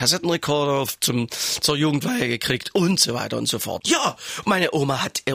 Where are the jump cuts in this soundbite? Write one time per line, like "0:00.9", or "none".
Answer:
0:03.8